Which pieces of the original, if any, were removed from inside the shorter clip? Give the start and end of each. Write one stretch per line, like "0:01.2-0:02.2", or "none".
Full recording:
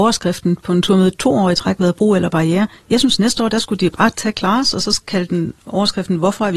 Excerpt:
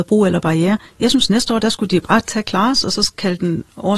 none